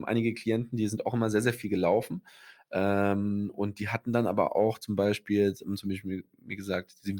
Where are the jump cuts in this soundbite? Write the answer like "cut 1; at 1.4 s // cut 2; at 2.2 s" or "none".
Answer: none